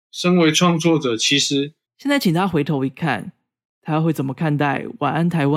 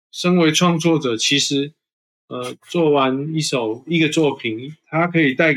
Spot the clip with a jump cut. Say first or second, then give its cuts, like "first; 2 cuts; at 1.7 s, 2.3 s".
first; 1 cut; at 1.9 s